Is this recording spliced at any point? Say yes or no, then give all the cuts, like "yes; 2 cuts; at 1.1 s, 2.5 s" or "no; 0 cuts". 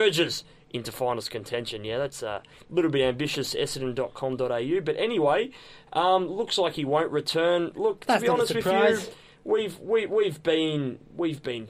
no; 0 cuts